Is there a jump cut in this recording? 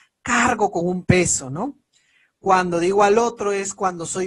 no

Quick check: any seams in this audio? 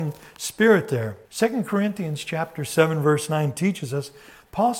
yes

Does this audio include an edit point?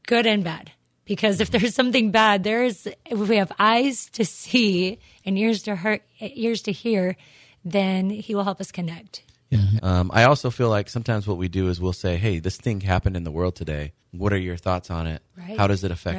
yes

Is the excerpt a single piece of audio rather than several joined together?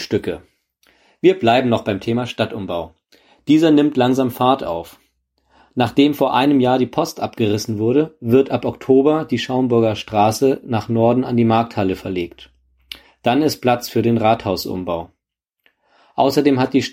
yes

